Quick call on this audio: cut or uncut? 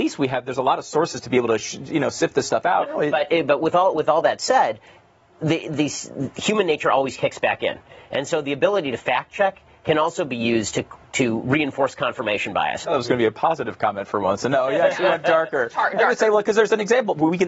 cut